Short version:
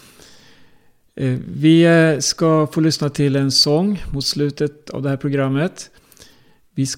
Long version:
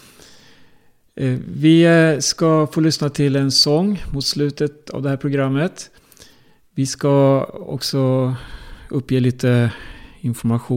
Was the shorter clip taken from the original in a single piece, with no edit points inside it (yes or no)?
yes